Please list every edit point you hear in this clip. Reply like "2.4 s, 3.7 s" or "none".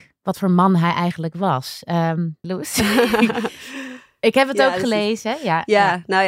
2.4 s